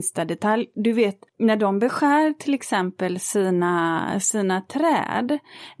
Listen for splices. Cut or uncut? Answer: cut